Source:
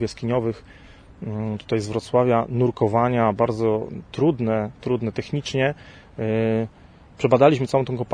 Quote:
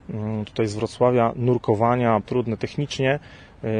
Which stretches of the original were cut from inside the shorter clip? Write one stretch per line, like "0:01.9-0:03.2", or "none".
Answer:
0:03.3-0:04.8